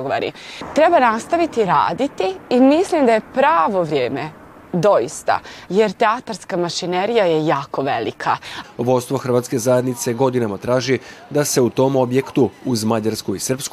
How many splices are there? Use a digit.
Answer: 2